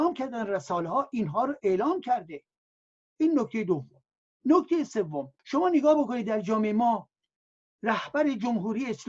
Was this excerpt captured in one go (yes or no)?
no